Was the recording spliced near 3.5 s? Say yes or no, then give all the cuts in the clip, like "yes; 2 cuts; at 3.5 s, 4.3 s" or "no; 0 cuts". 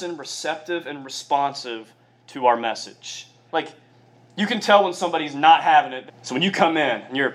yes; 2 cuts; at 3.5 s, 6.1 s